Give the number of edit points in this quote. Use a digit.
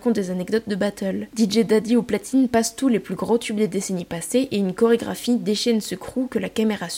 1